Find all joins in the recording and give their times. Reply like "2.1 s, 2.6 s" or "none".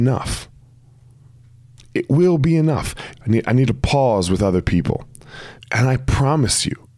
3.1 s, 5.6 s